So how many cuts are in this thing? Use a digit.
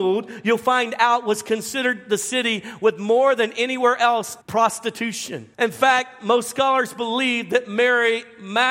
2